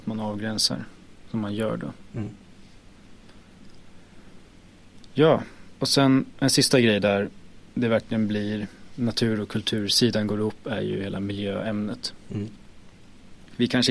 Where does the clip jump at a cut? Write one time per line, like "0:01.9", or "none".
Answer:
none